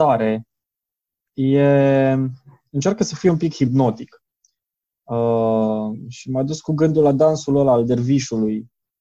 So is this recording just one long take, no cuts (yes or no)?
yes